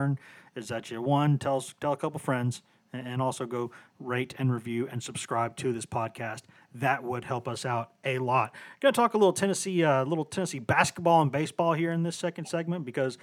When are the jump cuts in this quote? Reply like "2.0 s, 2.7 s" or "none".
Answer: none